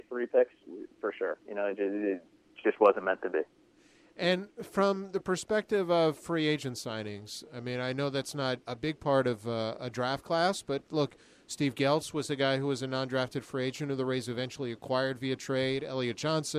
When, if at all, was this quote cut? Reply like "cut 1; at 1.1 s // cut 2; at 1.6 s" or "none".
cut 1; at 8.6 s